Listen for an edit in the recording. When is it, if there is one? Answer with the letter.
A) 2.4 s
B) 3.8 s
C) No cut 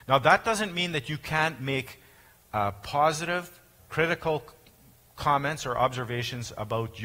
B